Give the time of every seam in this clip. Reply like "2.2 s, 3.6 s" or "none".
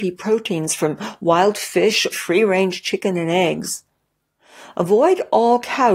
2.1 s